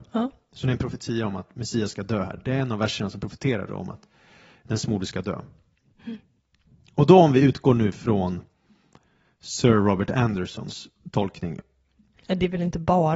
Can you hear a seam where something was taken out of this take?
no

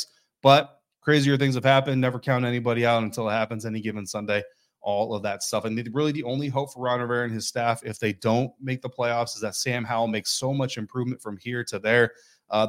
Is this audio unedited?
yes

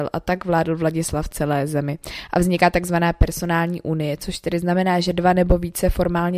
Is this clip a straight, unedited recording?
yes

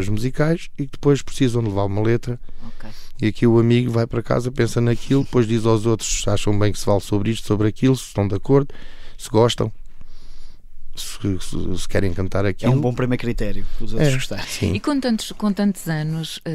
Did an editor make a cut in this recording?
yes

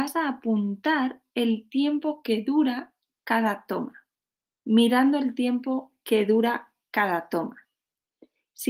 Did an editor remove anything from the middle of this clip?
yes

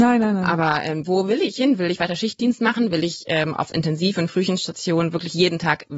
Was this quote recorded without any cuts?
yes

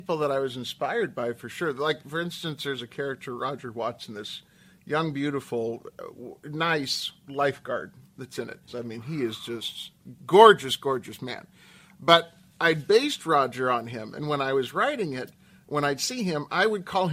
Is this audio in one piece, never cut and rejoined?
no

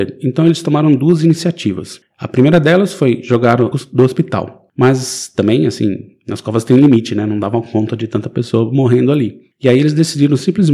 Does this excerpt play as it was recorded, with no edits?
no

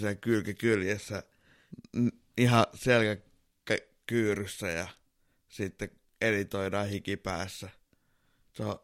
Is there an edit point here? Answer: no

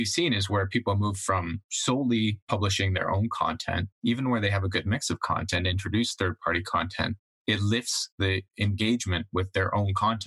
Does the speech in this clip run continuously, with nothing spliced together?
yes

